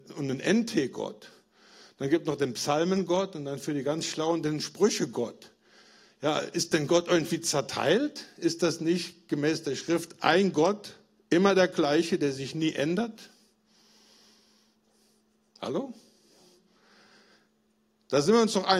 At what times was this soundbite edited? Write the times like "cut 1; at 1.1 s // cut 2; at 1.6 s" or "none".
none